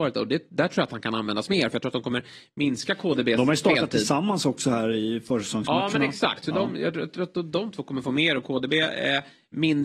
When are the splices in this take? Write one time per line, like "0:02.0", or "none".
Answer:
none